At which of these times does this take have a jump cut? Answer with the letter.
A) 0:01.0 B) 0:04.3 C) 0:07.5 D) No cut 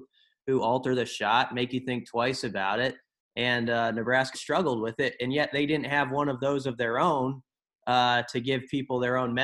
B